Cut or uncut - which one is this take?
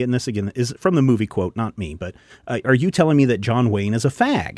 uncut